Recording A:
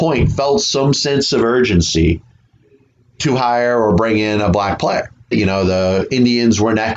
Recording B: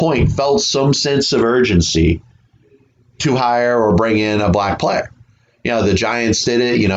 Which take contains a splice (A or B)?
A